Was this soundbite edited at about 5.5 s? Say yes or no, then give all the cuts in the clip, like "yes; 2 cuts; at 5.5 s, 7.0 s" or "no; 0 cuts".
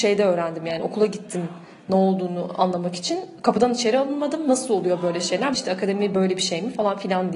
yes; 1 cut; at 5.5 s